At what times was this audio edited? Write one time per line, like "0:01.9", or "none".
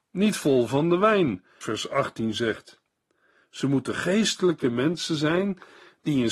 0:01.6